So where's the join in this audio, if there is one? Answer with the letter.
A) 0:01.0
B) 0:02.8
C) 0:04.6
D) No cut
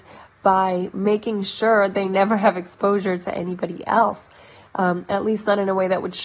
D